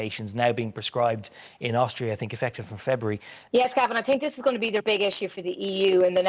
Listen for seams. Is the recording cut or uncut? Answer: cut